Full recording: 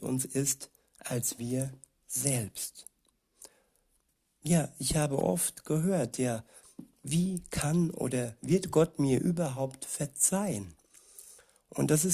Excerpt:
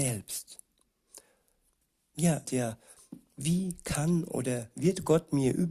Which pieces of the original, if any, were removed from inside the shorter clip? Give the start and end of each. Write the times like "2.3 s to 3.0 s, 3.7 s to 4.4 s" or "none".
4.7 s to 6.1 s